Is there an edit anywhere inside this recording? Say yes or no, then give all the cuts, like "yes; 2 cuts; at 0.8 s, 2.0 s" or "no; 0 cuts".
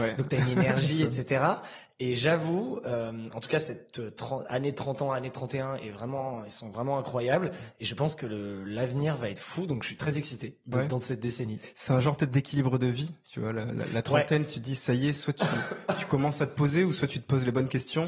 no; 0 cuts